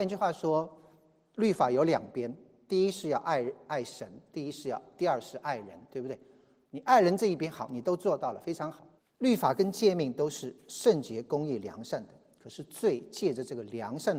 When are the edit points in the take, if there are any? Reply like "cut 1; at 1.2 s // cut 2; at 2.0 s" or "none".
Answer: cut 1; at 9.0 s

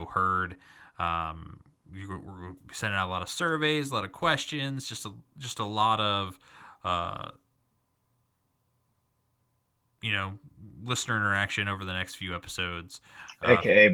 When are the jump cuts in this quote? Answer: none

